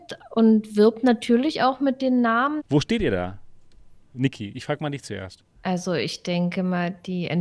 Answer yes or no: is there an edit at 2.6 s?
yes